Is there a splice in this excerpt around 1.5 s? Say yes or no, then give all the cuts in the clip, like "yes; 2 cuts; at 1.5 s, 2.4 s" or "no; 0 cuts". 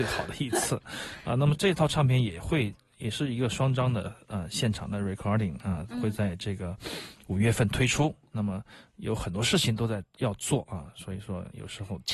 yes; 1 cut; at 1.5 s